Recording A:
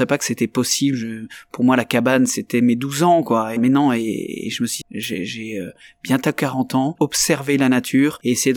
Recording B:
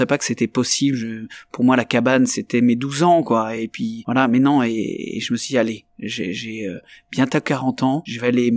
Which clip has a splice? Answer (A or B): A